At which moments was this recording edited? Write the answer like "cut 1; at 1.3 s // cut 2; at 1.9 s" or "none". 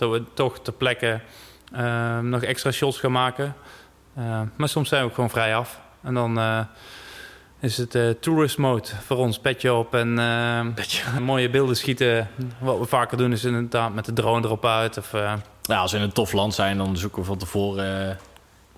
cut 1; at 11.2 s